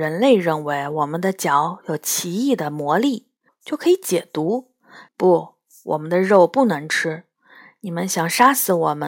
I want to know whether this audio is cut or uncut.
cut